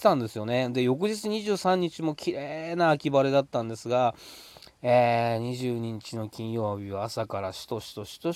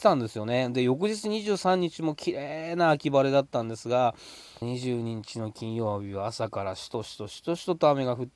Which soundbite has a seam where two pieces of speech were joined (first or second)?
second